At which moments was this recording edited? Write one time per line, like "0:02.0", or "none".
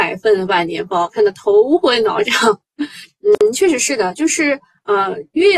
0:03.1

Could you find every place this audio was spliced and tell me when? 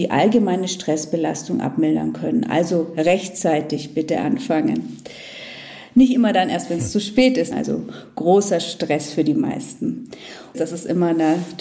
0:07.5
0:10.5

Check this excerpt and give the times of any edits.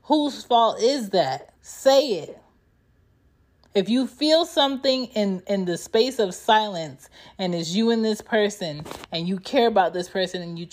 0:01.6

